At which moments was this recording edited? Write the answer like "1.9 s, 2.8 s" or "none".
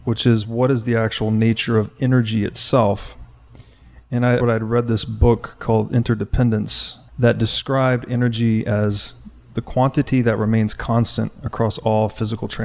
4.4 s, 7.1 s